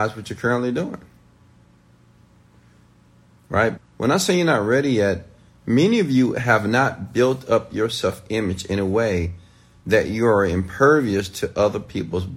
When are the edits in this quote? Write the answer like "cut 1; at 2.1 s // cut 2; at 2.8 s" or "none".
cut 1; at 3.8 s